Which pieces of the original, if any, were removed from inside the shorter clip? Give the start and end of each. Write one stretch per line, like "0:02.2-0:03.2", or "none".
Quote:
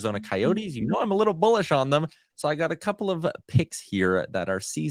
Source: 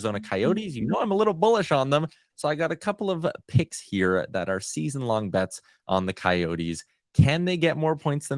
none